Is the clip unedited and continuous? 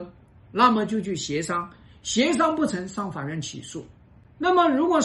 yes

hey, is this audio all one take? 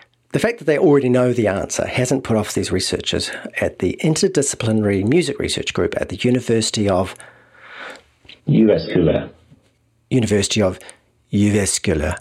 no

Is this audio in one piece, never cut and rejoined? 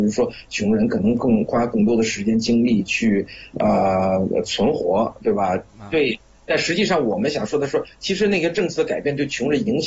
no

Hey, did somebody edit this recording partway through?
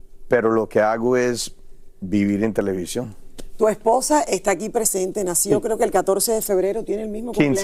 no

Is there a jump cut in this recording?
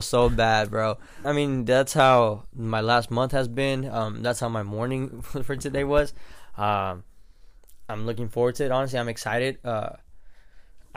yes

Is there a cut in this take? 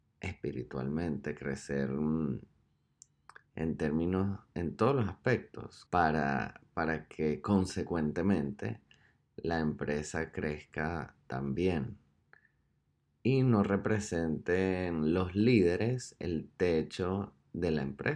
yes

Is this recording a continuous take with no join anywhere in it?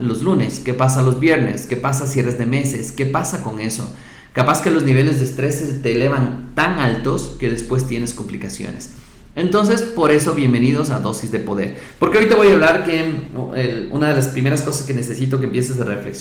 no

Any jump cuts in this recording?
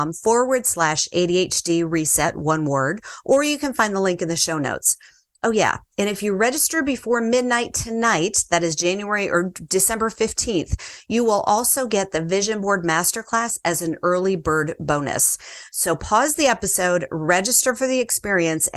no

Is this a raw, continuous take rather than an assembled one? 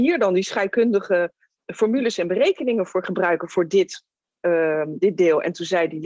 yes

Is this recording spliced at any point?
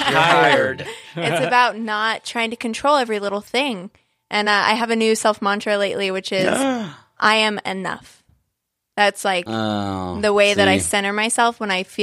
no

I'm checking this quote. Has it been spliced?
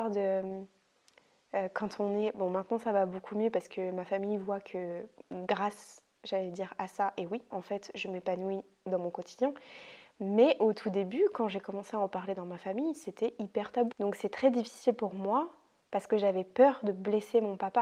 yes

